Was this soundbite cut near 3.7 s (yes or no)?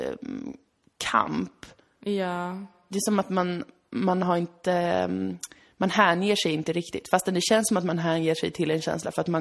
no